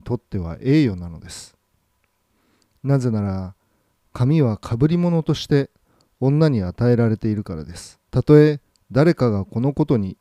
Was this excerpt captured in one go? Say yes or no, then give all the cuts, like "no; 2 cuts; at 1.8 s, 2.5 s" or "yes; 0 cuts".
no; 1 cut; at 8.1 s